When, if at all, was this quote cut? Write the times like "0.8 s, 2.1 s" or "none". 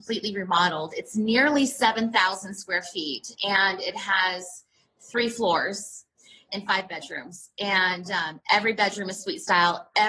6.5 s